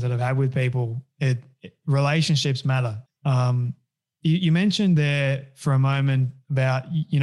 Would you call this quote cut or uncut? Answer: cut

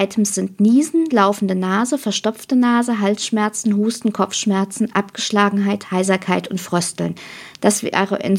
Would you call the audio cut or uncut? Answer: uncut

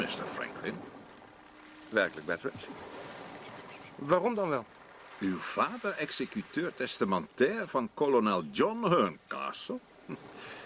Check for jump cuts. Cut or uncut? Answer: uncut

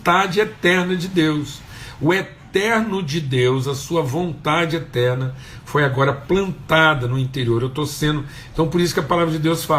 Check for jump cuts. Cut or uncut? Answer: uncut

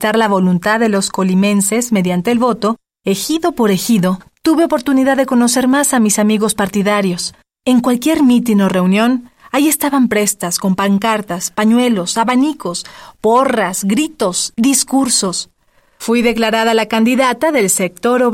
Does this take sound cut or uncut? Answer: cut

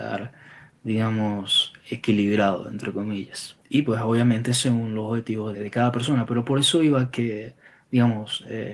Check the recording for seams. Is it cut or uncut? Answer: cut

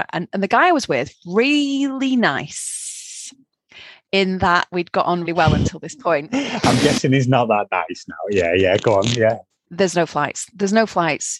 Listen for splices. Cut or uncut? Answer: cut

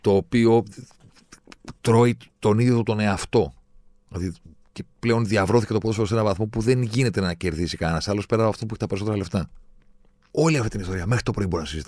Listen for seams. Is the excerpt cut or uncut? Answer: cut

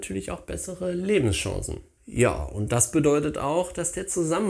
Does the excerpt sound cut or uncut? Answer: cut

